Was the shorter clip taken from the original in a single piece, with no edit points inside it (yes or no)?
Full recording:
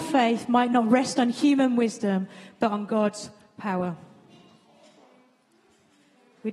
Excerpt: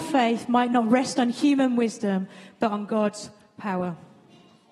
yes